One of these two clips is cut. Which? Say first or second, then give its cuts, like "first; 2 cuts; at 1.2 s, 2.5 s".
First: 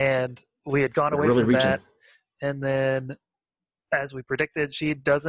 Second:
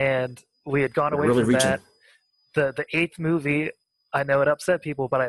first; 1 cut; at 2.3 s